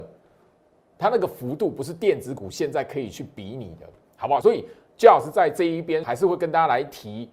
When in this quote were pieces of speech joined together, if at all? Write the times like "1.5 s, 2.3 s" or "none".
4.4 s, 6.0 s